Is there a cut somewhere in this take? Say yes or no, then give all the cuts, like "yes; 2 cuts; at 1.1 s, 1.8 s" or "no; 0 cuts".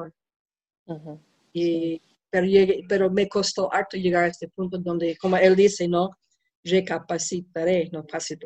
no; 0 cuts